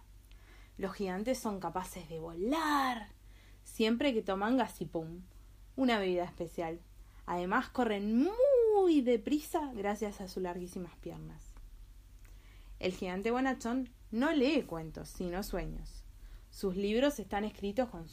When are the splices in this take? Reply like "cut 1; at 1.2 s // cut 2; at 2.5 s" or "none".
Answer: none